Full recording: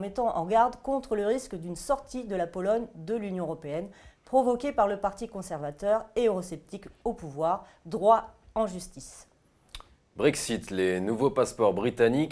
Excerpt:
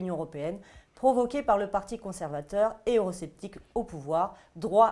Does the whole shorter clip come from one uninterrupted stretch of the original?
yes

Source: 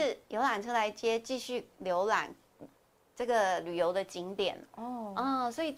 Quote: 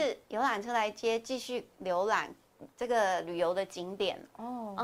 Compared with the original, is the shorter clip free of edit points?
no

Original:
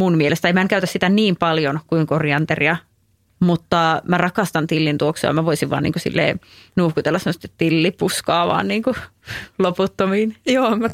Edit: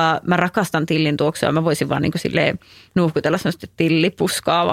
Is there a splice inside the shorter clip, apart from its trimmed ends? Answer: no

